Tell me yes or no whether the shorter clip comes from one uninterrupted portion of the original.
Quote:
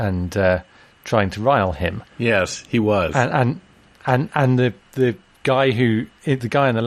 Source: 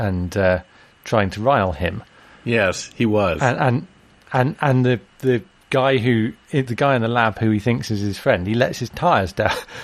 no